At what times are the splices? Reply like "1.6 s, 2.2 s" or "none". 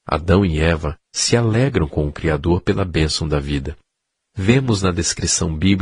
1.1 s, 4.2 s